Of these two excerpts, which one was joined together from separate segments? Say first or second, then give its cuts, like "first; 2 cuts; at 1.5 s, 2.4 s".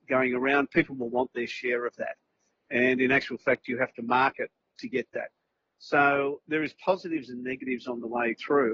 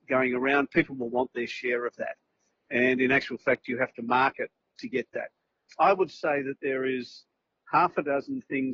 second; 1 cut; at 5.7 s